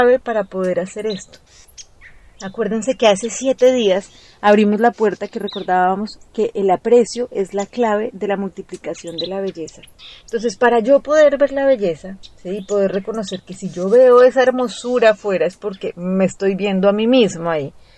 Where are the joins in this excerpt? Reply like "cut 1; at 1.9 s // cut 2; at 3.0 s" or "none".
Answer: none